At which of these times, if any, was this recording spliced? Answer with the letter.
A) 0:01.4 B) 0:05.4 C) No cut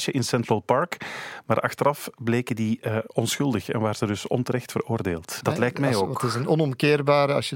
B